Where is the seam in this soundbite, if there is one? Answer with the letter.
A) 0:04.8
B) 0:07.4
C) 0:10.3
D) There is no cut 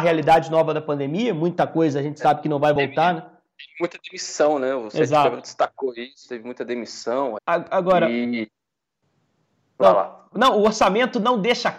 B